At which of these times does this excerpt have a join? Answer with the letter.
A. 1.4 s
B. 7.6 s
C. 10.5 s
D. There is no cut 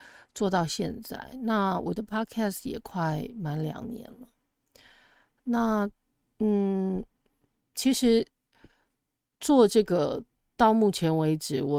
D